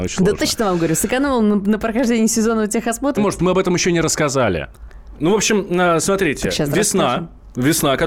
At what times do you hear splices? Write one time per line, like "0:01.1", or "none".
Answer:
0:03.2
0:05.2